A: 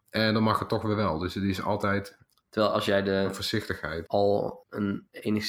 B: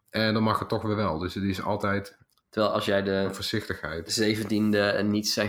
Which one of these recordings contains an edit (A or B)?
A